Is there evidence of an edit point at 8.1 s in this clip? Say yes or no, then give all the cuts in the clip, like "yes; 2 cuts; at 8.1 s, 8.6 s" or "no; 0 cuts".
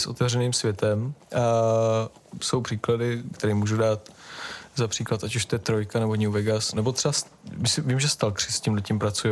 no; 3 cuts; at 1.2 s, 3.3 s, 6.7 s